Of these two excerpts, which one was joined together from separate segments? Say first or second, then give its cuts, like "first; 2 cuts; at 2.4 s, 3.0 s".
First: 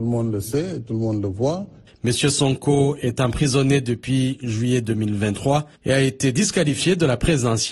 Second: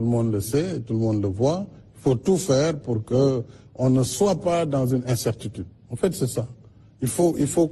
first; 2 cuts; at 1.9 s, 5.7 s